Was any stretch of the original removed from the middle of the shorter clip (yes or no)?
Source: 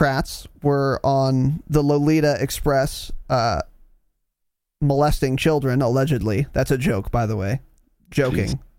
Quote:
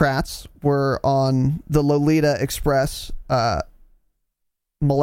no